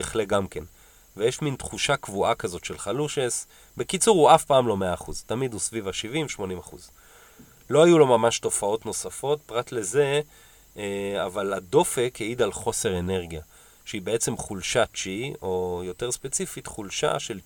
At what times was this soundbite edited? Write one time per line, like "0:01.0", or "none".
none